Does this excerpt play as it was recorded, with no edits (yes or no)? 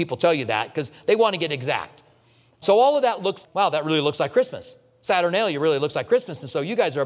no